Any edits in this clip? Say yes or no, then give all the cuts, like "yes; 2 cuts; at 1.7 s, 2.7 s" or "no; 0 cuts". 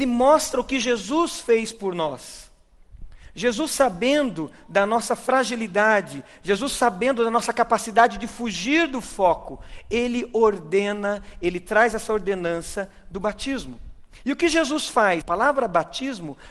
yes; 1 cut; at 15.2 s